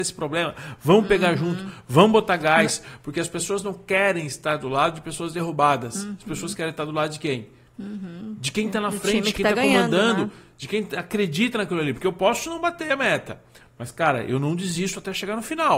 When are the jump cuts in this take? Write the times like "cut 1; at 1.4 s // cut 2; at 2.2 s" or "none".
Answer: none